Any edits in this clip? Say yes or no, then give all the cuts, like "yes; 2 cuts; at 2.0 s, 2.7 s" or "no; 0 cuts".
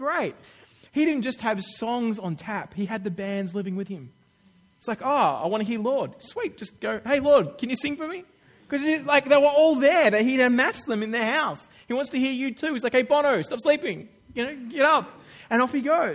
no; 0 cuts